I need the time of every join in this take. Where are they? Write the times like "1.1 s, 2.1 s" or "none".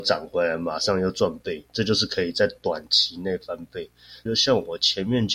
4.3 s